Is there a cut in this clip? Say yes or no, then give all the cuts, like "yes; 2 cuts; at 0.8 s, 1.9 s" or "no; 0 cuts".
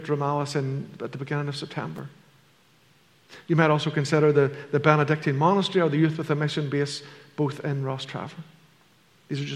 no; 0 cuts